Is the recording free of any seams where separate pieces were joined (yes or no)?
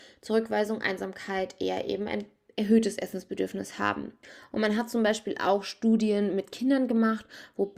yes